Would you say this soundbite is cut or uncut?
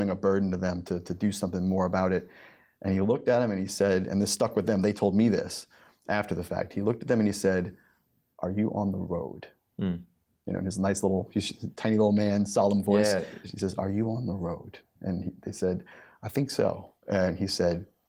uncut